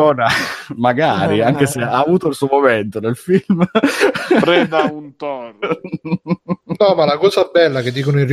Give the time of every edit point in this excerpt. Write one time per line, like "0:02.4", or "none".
none